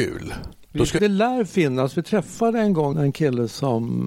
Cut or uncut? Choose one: cut